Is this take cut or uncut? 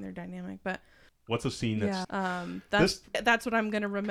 cut